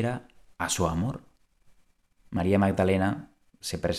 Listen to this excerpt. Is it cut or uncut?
cut